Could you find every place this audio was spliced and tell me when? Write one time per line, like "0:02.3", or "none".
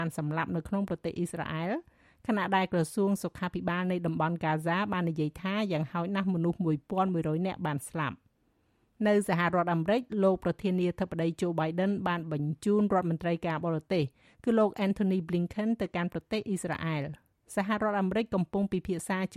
none